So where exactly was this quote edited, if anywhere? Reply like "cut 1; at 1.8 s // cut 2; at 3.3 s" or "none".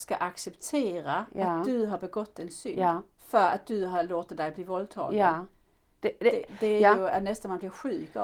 none